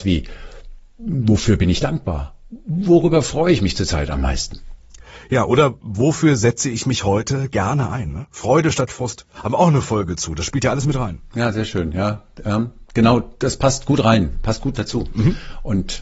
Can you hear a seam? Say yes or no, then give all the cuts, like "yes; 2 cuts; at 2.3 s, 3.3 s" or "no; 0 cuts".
no; 0 cuts